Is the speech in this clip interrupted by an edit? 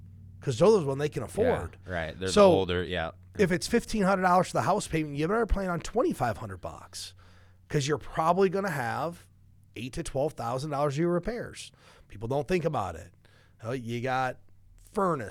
no; 0 cuts

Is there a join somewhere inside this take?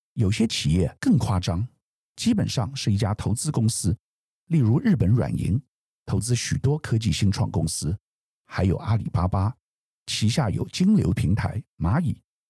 no; 0 cuts

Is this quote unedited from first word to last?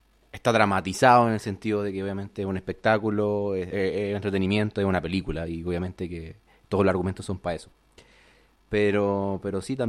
yes; 0 cuts

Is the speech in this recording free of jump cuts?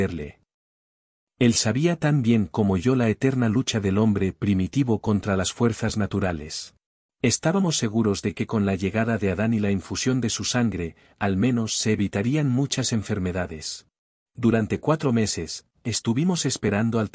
no; 2 cuts; at 7.0 s, 14.3 s

